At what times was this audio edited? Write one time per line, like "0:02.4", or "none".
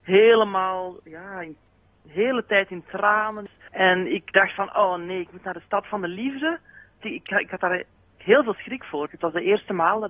0:07.0
0:09.1